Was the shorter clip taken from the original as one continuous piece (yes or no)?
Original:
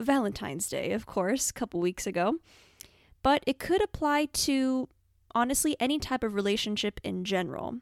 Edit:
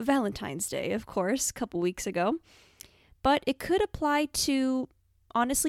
yes